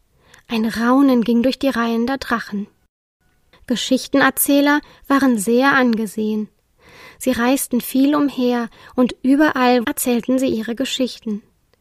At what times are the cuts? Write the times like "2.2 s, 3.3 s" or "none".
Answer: 9.8 s